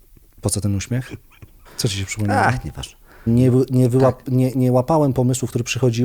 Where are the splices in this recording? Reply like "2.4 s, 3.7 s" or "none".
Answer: 1.7 s, 3.3 s